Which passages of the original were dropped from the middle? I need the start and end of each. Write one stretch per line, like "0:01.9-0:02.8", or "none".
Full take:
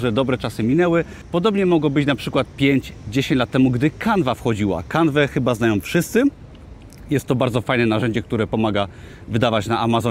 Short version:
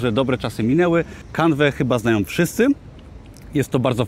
0:01.3-0:04.8